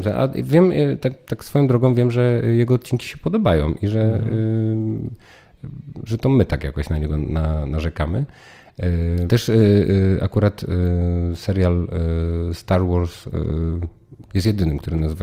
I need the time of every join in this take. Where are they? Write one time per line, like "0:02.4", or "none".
0:09.3
0:14.3